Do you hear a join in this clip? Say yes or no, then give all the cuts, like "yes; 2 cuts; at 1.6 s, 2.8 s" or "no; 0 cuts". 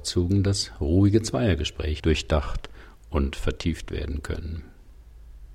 yes; 1 cut; at 2.0 s